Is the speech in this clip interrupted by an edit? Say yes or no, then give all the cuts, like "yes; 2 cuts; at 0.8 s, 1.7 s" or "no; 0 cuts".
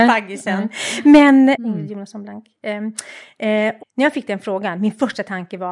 yes; 2 cuts; at 1.5 s, 3.8 s